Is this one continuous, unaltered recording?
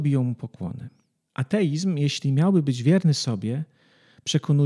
yes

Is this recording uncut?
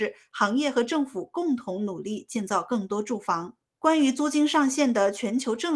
no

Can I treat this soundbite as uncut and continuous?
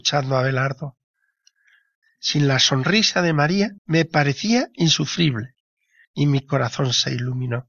no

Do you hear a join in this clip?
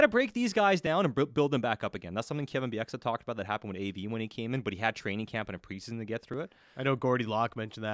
no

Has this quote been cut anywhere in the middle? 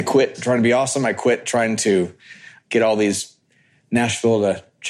no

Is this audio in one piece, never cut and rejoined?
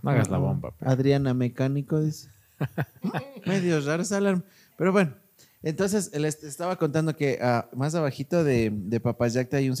yes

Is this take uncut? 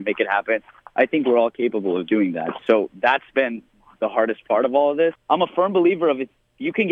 no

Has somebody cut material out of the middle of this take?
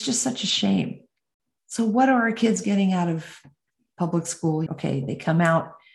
yes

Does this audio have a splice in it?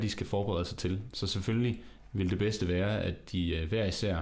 no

